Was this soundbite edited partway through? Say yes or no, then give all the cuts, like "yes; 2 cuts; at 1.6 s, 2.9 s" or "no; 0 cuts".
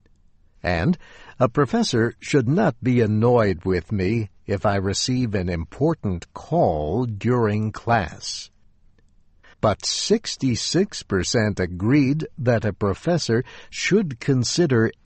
yes; 1 cut; at 9.5 s